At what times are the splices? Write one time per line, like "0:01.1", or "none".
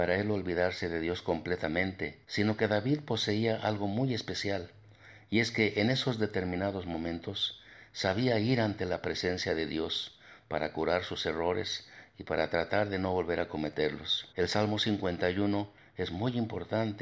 0:02.2
0:14.3